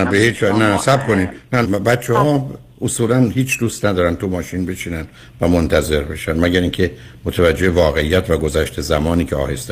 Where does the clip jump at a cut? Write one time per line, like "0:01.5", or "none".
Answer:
0:01.6